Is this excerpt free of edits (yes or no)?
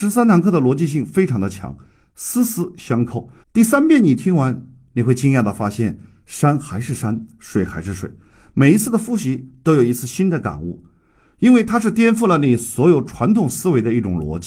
no